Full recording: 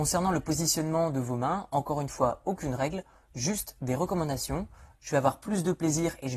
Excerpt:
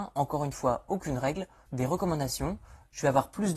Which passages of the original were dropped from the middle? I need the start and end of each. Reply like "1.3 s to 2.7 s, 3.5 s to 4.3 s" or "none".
3.2 s to 3.7 s